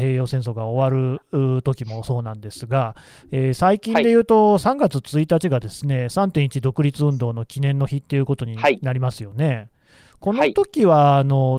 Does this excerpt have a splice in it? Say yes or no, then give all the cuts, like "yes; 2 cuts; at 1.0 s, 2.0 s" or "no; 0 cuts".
no; 0 cuts